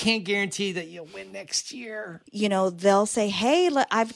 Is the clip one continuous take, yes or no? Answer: no